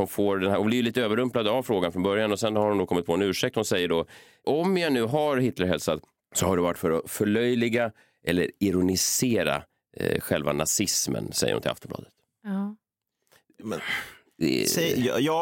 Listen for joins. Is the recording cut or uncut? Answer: uncut